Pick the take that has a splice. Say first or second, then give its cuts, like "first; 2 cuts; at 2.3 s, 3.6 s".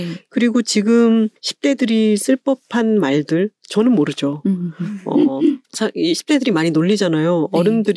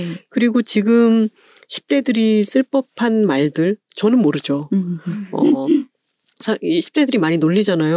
first; 2 cuts; at 1.4 s, 5.6 s